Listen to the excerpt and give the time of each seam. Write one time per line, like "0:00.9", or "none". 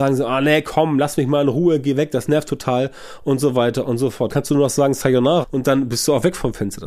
0:04.3
0:05.4